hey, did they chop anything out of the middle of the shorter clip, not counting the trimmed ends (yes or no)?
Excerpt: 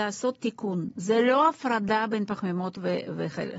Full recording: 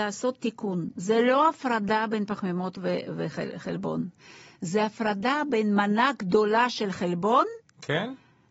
no